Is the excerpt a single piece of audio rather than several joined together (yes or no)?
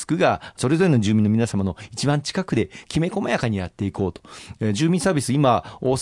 yes